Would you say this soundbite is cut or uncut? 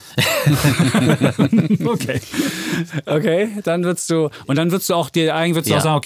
uncut